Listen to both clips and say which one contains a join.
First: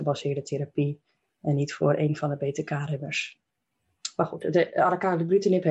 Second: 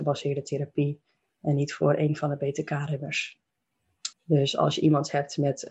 second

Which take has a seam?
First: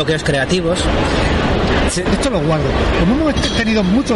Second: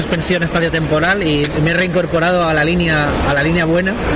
first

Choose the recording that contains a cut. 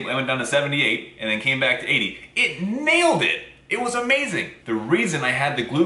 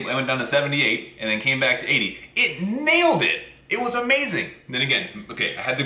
first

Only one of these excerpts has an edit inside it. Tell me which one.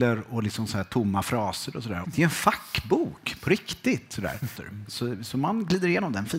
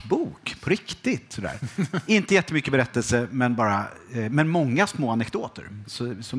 first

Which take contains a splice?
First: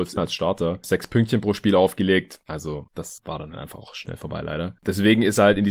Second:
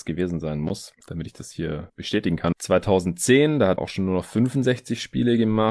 second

